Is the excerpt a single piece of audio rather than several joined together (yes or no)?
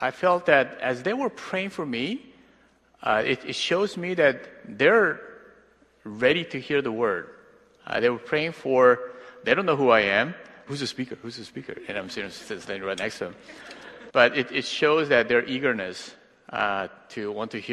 no